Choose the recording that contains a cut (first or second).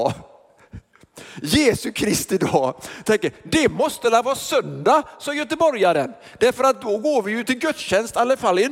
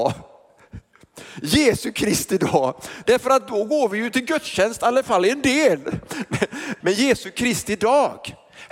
second